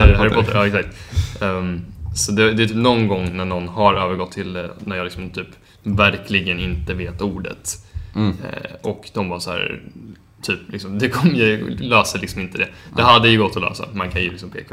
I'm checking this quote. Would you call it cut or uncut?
cut